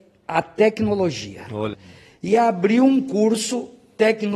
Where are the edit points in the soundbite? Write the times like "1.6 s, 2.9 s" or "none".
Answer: 1.7 s

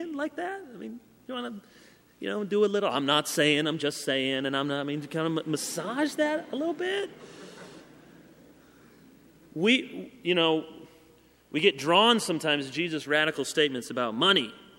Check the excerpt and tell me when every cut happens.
none

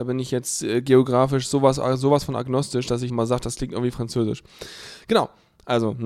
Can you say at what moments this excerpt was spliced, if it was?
3.1 s

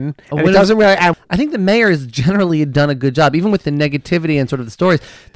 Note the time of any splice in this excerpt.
1.1 s

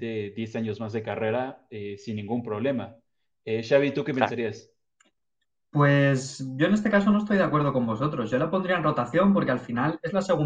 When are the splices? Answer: none

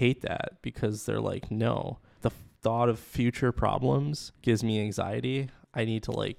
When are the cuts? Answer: 2.2 s, 4.3 s

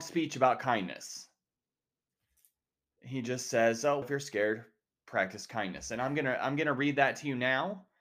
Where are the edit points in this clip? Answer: 4.0 s

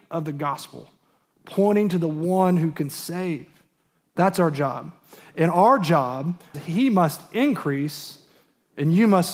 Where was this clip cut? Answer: 6.5 s

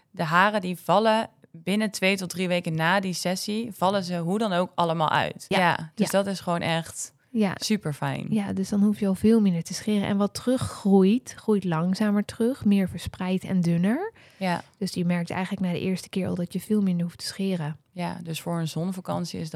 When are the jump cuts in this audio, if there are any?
5.5 s

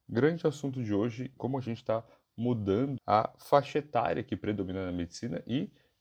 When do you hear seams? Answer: 1.4 s, 3.0 s

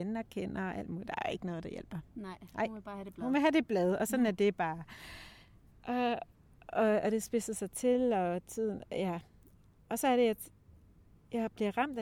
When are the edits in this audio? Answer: none

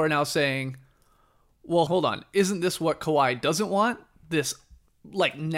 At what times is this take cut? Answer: 1.9 s

